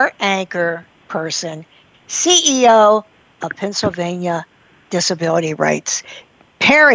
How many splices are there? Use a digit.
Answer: 1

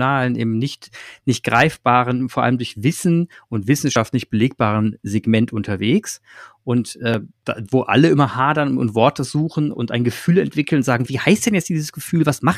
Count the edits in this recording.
3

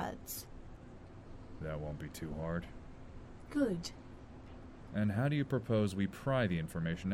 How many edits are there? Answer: 1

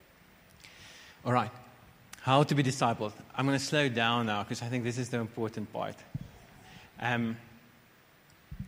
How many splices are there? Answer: 0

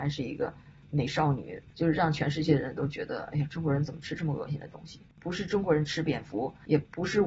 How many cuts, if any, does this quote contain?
1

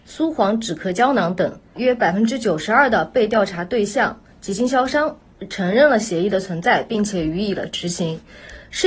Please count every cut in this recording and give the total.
1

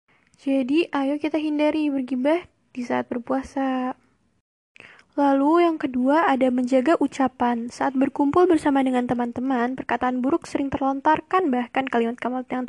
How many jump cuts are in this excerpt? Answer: 0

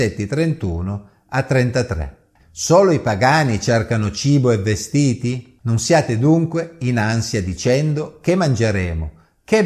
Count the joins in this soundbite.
2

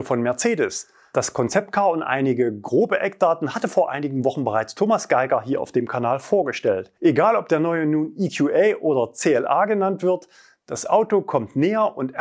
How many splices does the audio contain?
1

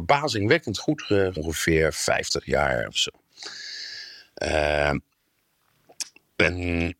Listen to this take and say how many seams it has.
1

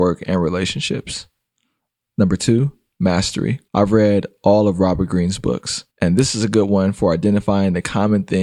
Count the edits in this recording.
2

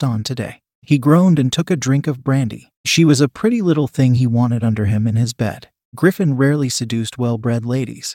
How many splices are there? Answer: 0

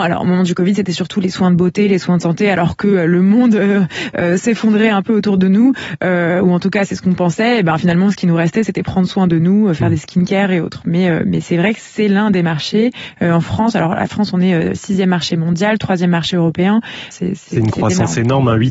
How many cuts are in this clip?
1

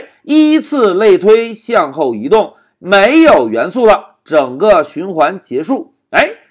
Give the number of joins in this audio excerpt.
1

